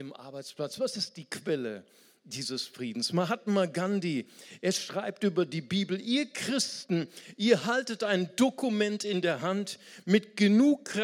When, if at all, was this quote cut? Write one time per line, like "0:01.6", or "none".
none

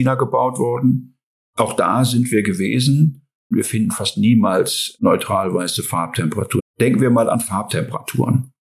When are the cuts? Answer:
0:03.5
0:06.6

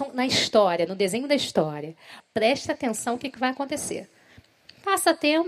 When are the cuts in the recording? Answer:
0:02.2

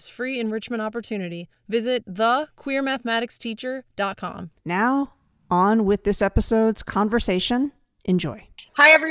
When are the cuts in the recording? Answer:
0:04.6

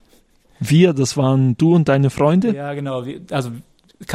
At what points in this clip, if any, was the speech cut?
none

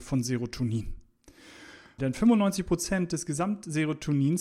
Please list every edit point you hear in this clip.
0:02.0

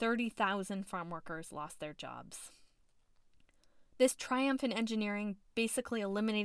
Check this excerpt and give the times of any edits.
none

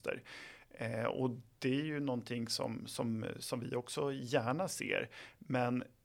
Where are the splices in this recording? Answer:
none

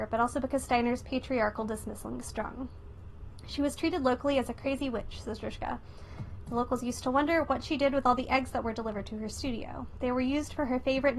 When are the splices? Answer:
none

